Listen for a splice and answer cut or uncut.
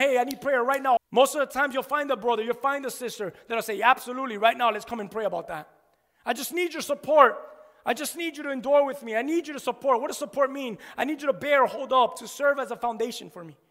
cut